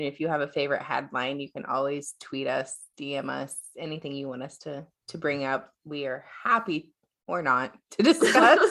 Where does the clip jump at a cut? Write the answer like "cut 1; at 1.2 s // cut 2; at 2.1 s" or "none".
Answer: none